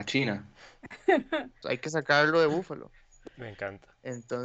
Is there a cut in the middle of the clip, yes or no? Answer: yes